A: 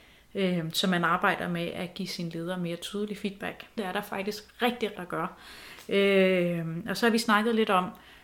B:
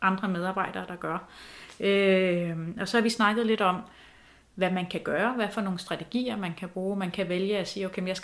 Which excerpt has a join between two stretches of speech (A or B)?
A